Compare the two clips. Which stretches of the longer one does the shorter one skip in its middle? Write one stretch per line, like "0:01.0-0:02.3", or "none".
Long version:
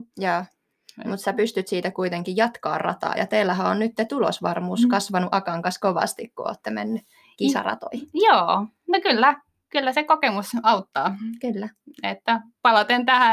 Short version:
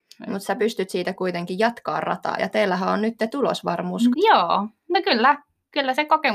0:04.9-0:08.1

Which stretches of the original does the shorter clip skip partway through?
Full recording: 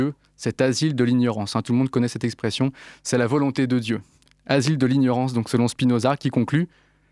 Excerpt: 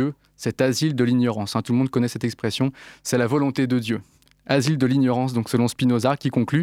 none

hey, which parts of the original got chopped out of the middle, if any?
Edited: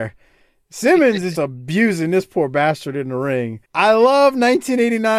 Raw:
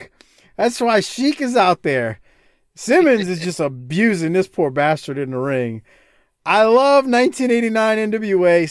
0:03.4-0:03.6
0:05.9-0:06.4

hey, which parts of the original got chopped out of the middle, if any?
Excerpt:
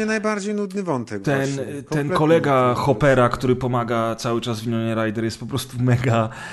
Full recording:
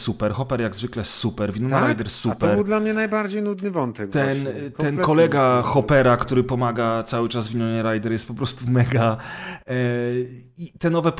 none

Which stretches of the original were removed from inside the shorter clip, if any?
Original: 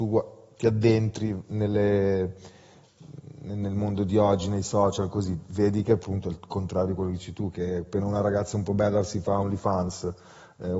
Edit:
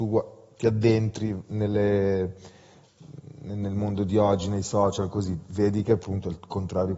none

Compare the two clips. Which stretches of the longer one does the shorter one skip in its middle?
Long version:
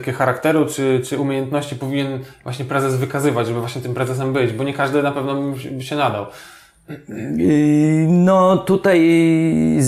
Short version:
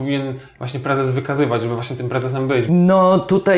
0:04.5-0:08.1

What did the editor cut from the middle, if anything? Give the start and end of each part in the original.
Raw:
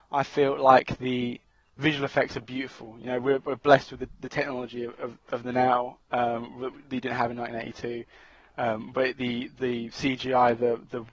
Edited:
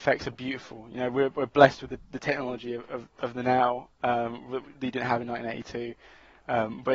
none

